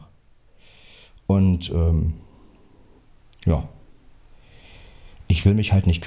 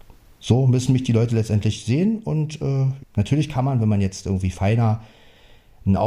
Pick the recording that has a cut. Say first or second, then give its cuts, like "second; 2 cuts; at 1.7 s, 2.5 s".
second; 1 cut; at 3.0 s